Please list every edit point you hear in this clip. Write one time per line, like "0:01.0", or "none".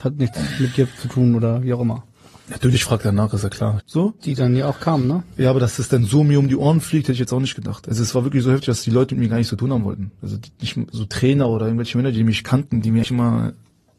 0:03.8
0:13.0